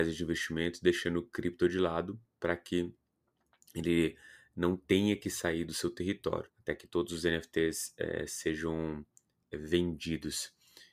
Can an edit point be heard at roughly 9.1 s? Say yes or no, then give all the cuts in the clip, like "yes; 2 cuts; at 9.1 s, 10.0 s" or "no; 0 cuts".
no; 1 cut; at 6.5 s